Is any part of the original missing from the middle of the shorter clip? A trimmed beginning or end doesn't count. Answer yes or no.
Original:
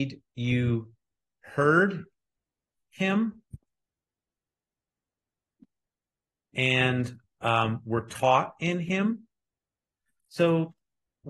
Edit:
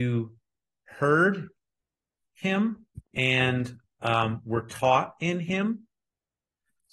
yes